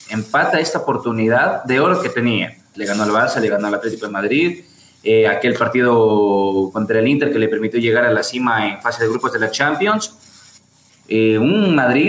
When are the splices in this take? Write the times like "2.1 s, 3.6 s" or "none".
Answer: 2.7 s, 10.9 s